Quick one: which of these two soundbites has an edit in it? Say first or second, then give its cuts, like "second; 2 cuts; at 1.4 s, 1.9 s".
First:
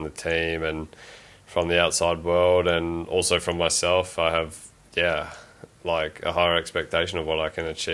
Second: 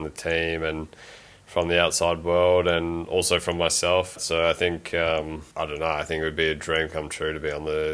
second; 2 cuts; at 4.2 s, 5.5 s